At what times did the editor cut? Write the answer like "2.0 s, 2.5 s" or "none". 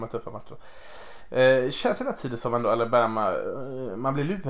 none